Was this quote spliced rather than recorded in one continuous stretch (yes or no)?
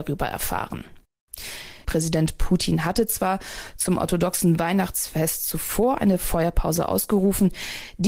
yes